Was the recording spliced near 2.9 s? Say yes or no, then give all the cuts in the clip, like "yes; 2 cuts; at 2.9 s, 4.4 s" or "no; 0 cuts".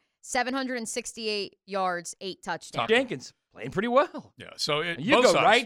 yes; 1 cut; at 2.9 s